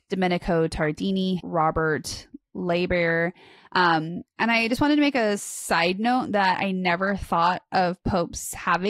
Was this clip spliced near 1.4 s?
yes; 1 cut; at 1.4 s

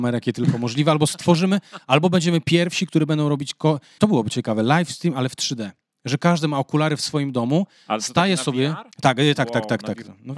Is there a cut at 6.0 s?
no; 2 cuts; at 4.0 s, 8.9 s

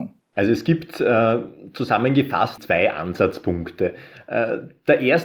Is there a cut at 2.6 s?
yes; 1 cut; at 2.6 s

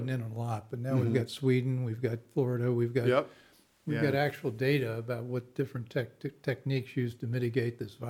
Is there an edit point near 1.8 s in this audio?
no; 0 cuts

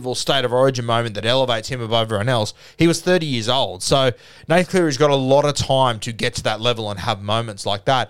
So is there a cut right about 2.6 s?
no; 0 cuts

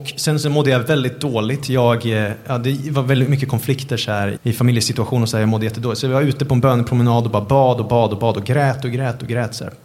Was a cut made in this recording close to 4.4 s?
yes; 1 cut; at 4.4 s

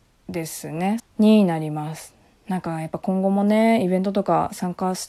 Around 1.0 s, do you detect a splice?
yes; 1 cut; at 1.0 s

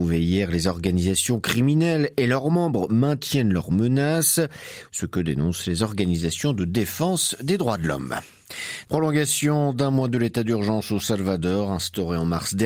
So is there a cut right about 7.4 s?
no; 2 cuts; at 4.9 s, 8.8 s

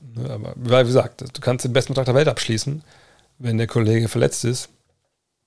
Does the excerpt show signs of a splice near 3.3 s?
no; 0 cuts

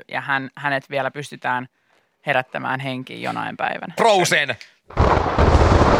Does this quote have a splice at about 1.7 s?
no; 1 cut; at 4.0 s

